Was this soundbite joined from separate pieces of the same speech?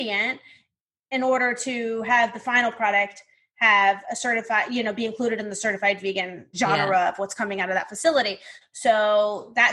yes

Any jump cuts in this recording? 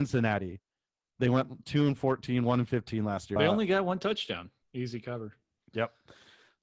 yes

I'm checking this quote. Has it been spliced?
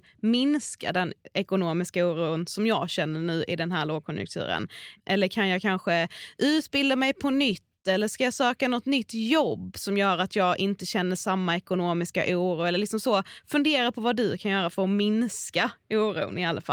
no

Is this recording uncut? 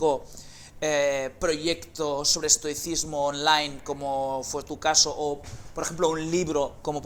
yes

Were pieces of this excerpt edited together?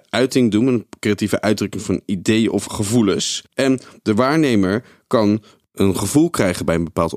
yes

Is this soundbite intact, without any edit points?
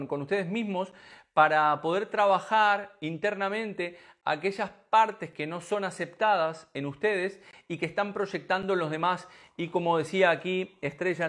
yes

